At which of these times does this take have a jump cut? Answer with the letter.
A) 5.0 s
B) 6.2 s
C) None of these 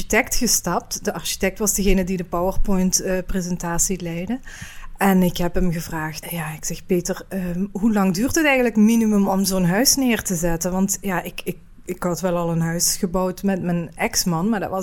B